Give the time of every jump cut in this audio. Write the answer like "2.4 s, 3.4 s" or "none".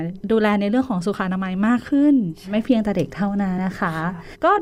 3.6 s